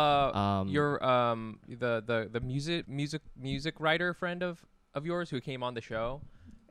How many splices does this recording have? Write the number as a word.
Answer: one